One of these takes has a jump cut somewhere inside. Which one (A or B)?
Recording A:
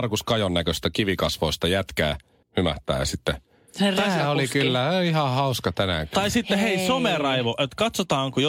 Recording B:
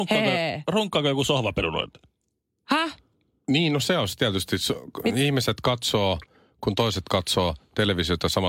A